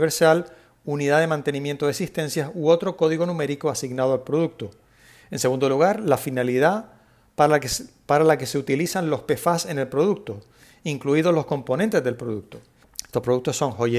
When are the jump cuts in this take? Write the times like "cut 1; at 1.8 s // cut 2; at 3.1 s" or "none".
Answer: cut 1; at 12.8 s